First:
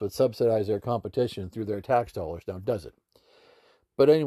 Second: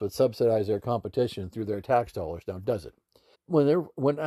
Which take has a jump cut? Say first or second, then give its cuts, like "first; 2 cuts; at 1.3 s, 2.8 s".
second; 1 cut; at 3.3 s